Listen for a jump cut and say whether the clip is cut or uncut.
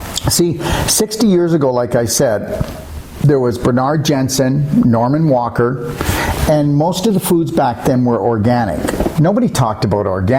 cut